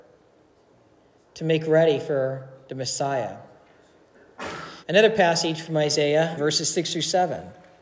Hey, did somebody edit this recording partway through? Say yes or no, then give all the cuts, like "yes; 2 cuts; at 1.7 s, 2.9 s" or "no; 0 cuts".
yes; 2 cuts; at 4.8 s, 6.4 s